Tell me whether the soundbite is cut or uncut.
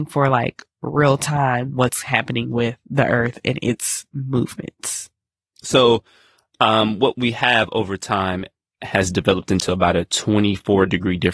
cut